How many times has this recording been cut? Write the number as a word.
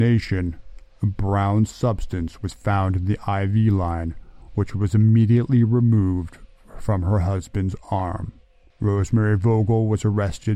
one